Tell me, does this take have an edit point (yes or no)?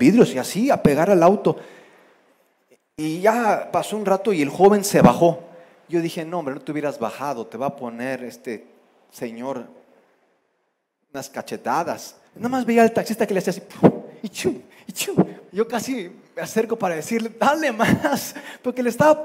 yes